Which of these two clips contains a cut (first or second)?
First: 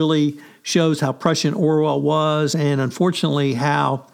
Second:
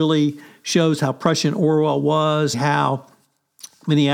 second